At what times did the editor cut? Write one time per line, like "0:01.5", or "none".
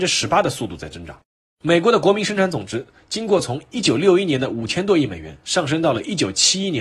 0:01.5